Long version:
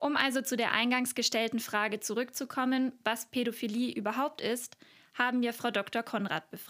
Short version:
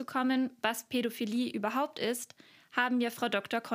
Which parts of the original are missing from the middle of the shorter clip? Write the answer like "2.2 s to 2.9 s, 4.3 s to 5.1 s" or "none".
none

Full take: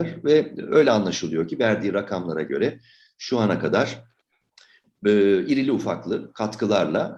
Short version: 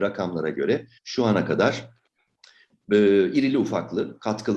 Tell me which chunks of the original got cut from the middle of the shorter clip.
2.9 s to 3.1 s

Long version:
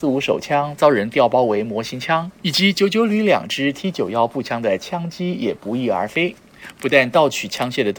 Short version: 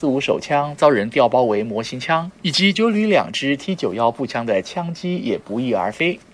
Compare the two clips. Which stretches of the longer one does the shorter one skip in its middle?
2.7 s to 2.9 s

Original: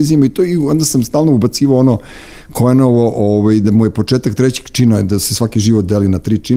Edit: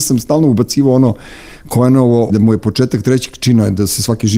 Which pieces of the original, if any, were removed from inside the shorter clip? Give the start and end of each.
3.1 s to 3.6 s

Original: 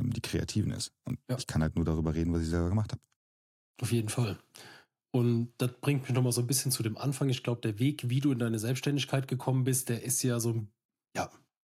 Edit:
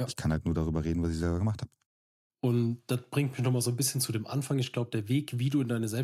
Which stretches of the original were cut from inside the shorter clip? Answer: 3.6 s to 5.0 s

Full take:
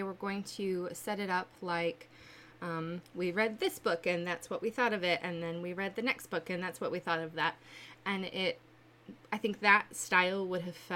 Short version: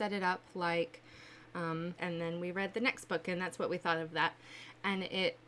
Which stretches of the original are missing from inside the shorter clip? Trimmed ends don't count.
3.0 s to 5.2 s

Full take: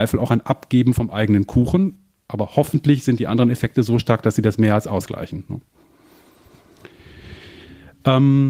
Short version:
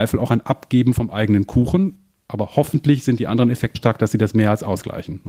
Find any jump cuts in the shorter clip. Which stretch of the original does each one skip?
3.7 s to 4.0 s

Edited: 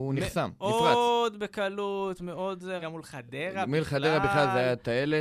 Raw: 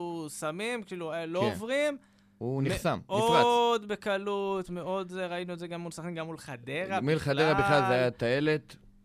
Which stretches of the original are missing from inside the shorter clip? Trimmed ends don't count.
5.3 s to 6.1 s

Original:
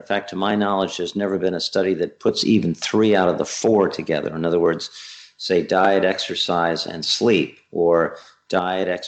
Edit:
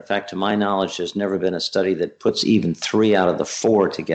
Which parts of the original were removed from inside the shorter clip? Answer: none

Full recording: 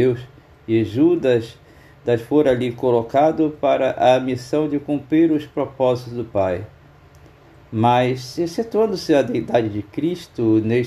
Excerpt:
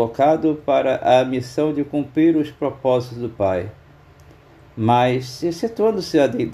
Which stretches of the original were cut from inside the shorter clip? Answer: none

